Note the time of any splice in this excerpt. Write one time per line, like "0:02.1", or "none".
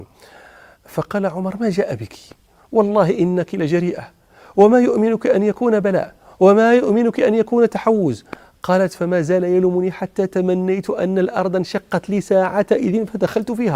none